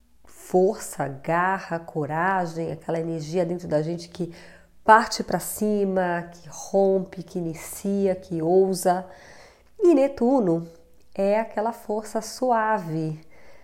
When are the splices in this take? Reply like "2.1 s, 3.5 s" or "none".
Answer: none